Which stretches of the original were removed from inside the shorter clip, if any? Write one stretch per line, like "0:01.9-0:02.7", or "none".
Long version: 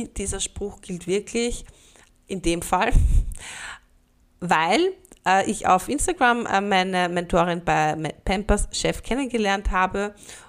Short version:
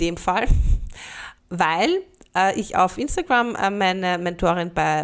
0:03.8-0:04.3